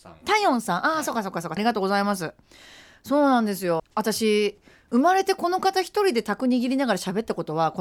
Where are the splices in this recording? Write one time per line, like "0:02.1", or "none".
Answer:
0:01.6
0:03.8